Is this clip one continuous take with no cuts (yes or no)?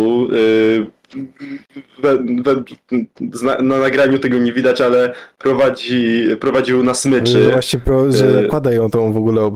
yes